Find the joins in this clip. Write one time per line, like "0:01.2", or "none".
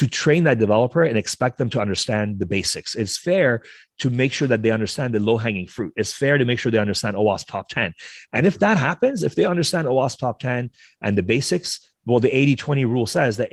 none